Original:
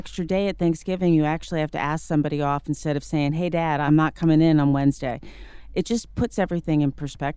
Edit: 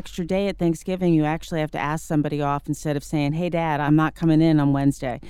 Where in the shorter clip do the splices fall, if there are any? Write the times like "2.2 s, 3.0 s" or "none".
none